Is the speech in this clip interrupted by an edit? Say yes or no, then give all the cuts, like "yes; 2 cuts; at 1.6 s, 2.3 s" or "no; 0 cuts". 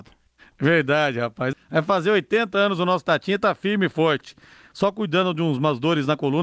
yes; 1 cut; at 1.5 s